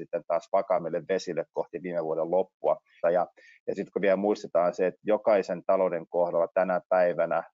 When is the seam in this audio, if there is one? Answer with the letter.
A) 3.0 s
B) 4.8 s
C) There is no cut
A